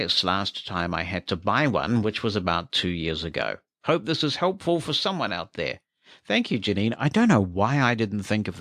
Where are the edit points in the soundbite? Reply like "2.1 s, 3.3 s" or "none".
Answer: 3.7 s

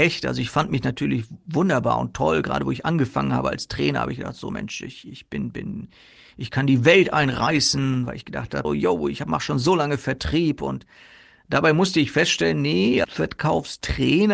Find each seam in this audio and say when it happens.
8.6 s, 13.0 s

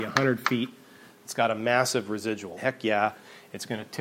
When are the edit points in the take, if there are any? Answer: 2.6 s

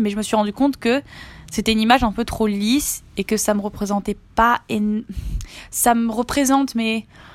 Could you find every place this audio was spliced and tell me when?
none

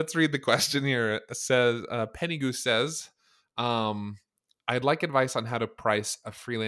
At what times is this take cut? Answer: none

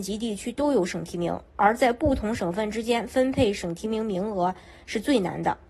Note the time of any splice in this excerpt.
none

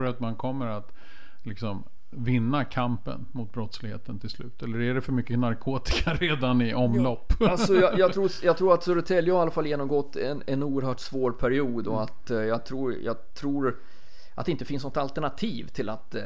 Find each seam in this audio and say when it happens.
none

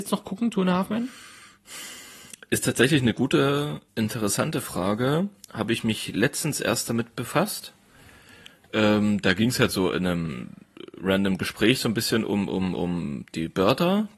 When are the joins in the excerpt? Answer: 3.9 s

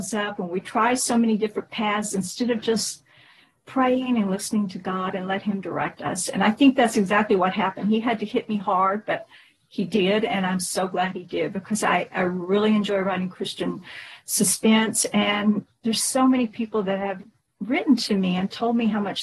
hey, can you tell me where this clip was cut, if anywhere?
none

